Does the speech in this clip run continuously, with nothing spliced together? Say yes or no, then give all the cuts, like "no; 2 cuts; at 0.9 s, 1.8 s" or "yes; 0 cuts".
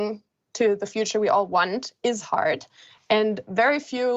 yes; 0 cuts